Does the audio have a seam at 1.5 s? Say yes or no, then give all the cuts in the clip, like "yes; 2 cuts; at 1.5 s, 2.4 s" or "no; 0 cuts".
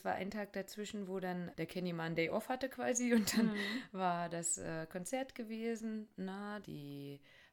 yes; 2 cuts; at 1.5 s, 6.6 s